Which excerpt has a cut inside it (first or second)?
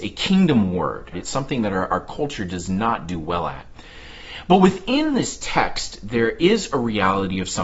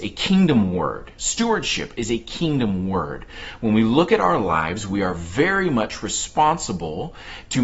first